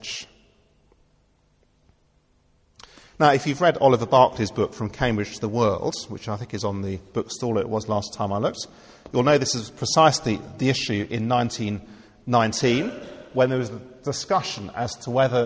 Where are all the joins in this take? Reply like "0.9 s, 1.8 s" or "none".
none